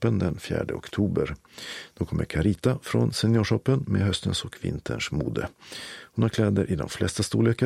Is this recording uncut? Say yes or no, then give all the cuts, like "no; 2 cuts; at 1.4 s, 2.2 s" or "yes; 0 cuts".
yes; 0 cuts